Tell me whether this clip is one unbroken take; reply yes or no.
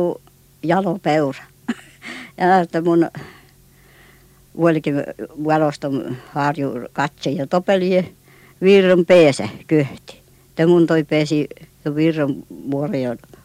yes